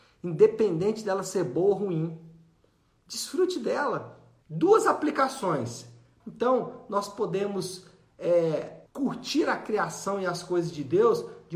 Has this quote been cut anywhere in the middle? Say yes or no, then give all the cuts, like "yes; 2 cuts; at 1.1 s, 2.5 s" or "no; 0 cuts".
yes; 3 cuts; at 4.4 s, 6.2 s, 8.9 s